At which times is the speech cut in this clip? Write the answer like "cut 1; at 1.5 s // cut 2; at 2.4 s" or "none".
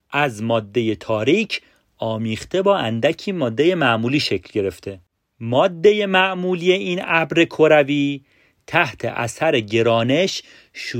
none

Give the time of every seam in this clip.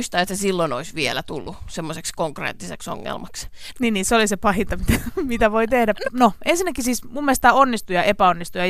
cut 1; at 3.7 s // cut 2; at 6.0 s

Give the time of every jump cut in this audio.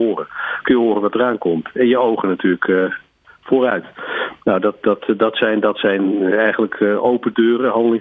none

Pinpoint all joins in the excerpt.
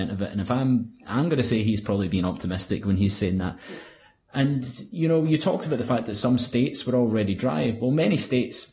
none

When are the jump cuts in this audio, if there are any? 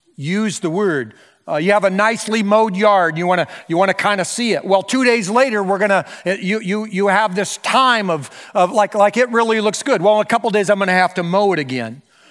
none

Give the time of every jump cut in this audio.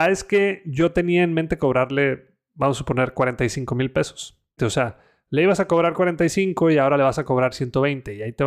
cut 1; at 4.6 s

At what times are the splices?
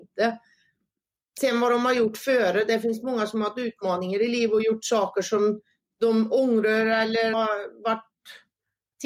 cut 1; at 7.3 s

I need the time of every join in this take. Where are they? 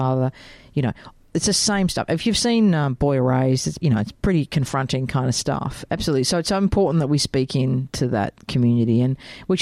cut 1; at 3.8 s // cut 2; at 5.9 s

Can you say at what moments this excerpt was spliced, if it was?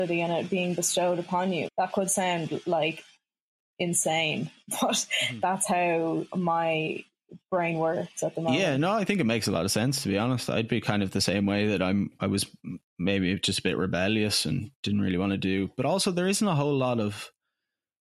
cut 1; at 1.7 s

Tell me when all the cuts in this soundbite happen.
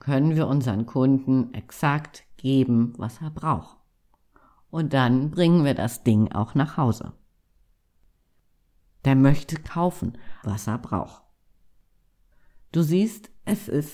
cut 1; at 9.0 s // cut 2; at 10.4 s

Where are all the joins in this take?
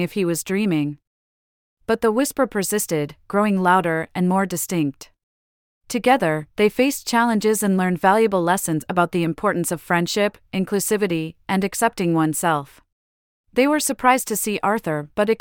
cut 1; at 5.8 s // cut 2; at 13.4 s

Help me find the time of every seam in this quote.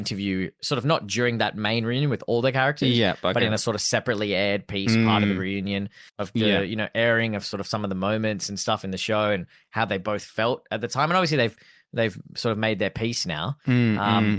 cut 1; at 6.1 s

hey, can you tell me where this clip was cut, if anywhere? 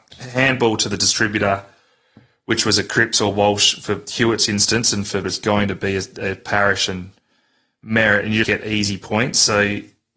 cut 1; at 5.2 s // cut 2; at 8.4 s

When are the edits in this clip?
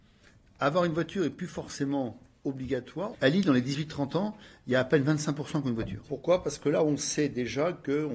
cut 1; at 3.1 s // cut 2; at 6.0 s

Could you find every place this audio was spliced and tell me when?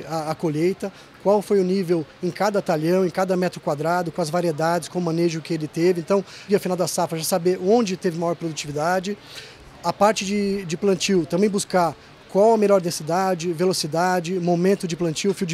cut 1; at 6.5 s

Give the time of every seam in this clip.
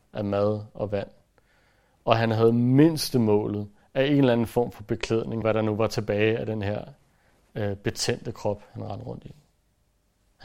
cut 1; at 5.4 s

